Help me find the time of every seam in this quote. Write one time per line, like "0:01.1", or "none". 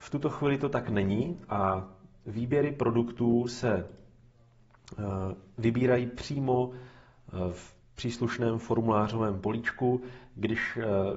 none

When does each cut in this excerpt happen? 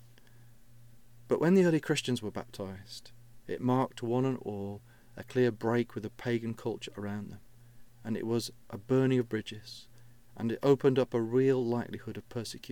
none

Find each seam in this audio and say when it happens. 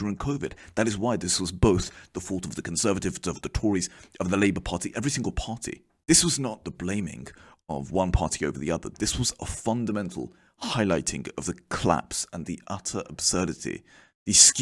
none

